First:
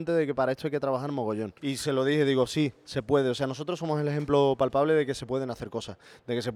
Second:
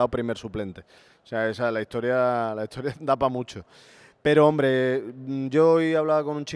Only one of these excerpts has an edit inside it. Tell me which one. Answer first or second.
first